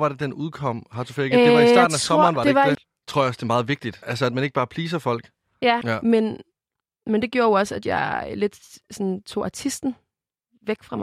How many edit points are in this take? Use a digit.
3